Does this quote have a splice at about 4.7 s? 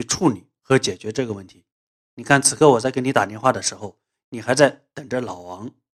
no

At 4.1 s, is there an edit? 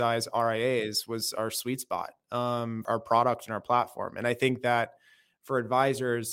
no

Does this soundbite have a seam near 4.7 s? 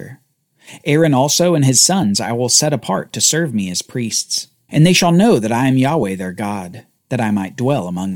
yes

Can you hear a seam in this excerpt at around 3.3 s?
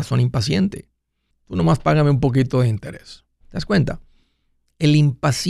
no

